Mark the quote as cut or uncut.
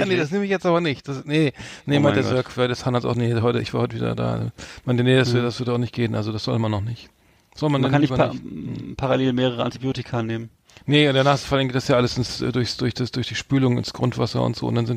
uncut